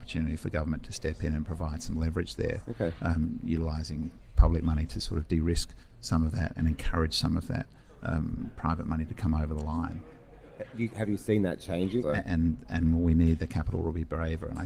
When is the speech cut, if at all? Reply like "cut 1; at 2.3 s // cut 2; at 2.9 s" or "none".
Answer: cut 1; at 12.0 s